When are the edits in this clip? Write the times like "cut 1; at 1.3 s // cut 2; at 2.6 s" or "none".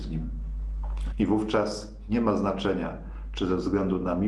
cut 1; at 1.1 s